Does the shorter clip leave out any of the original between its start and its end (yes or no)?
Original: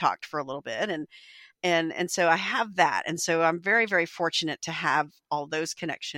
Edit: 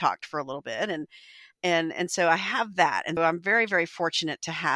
yes